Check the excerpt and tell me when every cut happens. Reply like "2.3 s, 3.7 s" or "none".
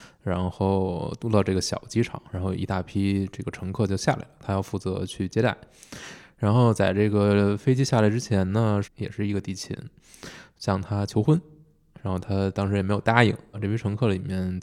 8.8 s, 13.5 s